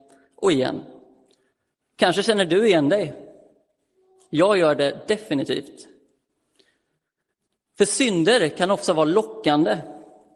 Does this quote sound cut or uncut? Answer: uncut